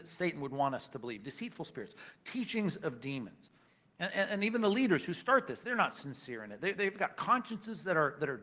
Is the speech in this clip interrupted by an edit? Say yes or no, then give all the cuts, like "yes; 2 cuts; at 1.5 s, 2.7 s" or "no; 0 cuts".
no; 0 cuts